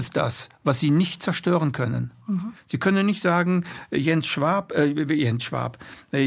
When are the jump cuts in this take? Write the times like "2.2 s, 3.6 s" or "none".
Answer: 2.6 s